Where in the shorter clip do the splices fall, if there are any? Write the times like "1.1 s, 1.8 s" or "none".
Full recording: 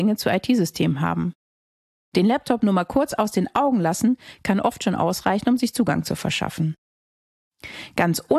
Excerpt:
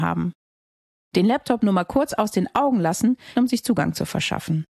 3.3 s